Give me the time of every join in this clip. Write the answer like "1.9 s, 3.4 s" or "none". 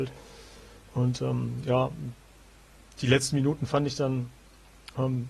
none